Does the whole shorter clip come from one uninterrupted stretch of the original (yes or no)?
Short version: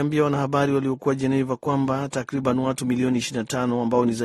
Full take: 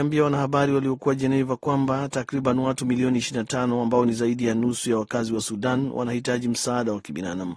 yes